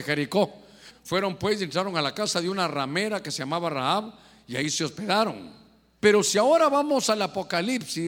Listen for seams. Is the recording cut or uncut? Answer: cut